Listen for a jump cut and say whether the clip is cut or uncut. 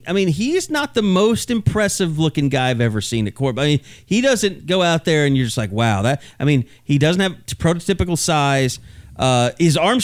uncut